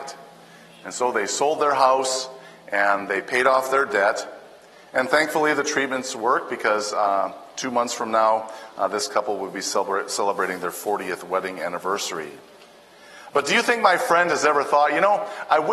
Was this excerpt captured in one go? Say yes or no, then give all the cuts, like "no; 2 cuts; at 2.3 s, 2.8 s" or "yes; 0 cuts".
yes; 0 cuts